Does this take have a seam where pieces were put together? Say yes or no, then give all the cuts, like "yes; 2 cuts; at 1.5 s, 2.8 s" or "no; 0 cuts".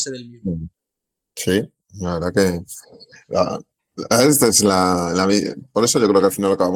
no; 0 cuts